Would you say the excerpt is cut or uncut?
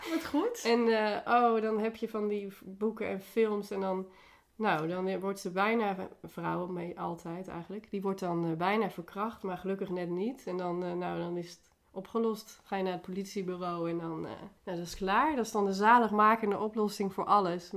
cut